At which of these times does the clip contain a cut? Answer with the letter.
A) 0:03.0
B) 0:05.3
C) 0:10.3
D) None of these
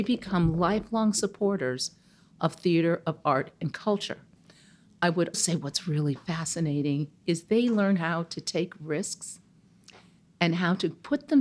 B